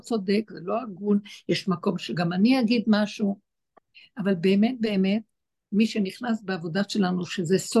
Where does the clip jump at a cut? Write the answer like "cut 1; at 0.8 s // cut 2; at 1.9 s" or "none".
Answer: none

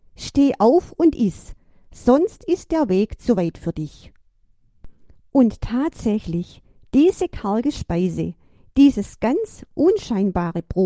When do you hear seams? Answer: none

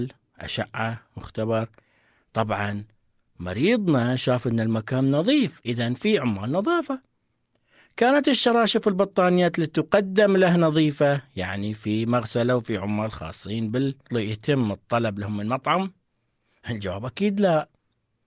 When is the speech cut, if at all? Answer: cut 1; at 14.1 s

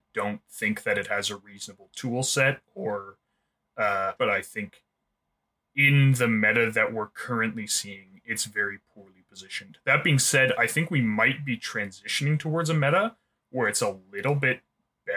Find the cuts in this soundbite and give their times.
cut 1; at 4.2 s

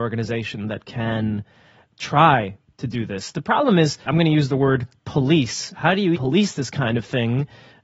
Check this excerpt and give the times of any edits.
cut 1; at 4.1 s // cut 2; at 6.1 s

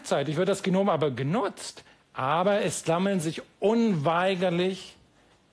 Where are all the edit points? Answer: cut 1; at 2.0 s

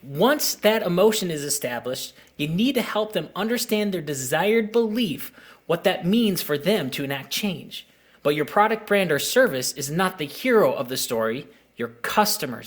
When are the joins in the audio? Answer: cut 1; at 8.1 s

